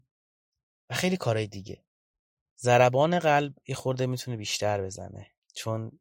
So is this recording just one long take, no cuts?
yes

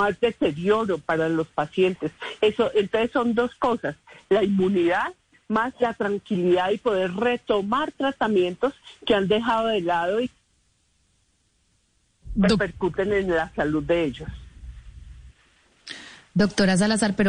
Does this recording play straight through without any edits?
yes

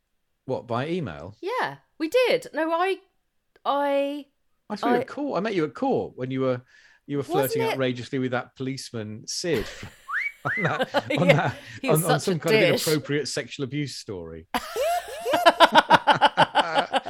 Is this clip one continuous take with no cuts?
yes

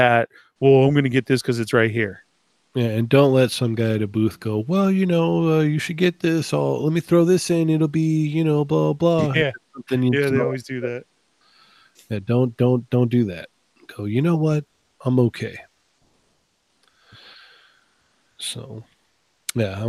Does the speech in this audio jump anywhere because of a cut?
no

